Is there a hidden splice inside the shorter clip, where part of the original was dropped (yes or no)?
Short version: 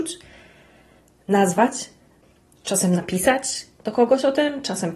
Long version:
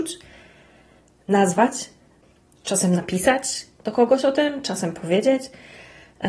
no